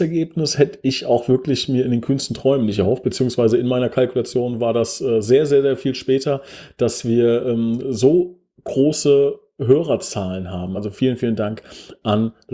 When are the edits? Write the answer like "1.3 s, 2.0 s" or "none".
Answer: 10.7 s